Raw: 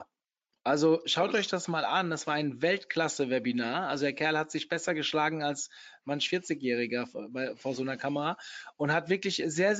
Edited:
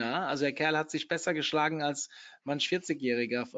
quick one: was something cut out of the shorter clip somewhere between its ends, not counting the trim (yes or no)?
no